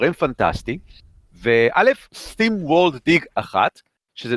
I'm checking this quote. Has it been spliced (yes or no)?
yes